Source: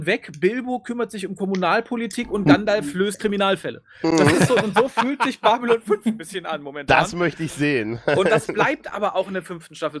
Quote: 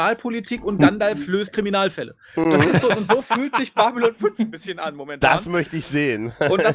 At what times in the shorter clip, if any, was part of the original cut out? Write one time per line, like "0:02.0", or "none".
none